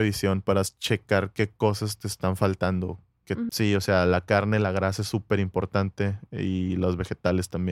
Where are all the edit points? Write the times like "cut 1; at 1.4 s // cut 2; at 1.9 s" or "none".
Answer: cut 1; at 3.5 s

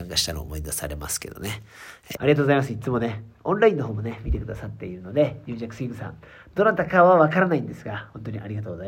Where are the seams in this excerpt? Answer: cut 1; at 2.2 s

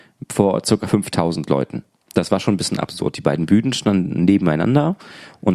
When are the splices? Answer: none

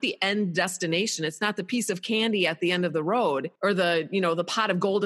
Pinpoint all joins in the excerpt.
cut 1; at 3.6 s

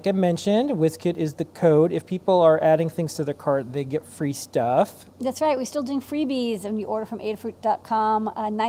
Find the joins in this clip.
none

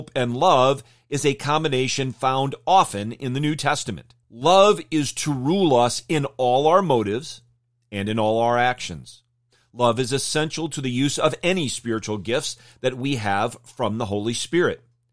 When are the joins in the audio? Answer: cut 1; at 4.2 s

